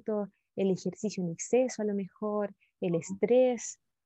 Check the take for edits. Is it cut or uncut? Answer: uncut